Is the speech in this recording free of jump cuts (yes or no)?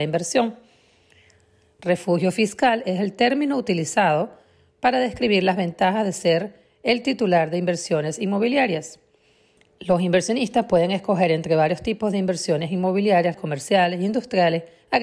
no